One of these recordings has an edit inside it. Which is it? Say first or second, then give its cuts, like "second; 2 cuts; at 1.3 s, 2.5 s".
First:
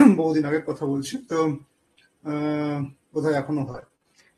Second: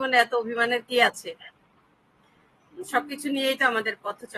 first; 1 cut; at 3.0 s